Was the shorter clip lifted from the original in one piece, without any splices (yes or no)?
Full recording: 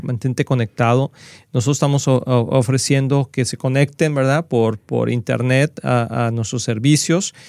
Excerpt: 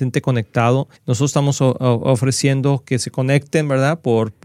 no